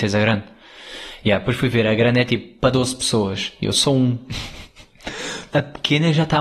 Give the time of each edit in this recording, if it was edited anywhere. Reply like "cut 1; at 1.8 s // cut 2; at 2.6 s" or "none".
cut 1; at 5.5 s